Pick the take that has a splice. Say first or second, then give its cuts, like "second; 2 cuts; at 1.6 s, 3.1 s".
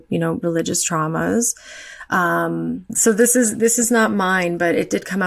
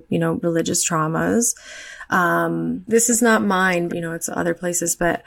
second; 2 cuts; at 2.9 s, 3.9 s